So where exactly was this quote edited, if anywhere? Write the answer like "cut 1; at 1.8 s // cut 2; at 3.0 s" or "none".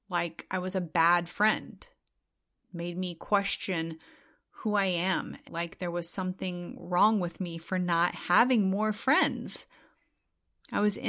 cut 1; at 5.5 s